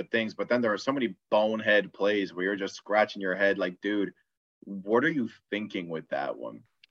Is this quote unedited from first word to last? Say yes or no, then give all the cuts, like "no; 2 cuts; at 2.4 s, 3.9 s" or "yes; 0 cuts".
yes; 0 cuts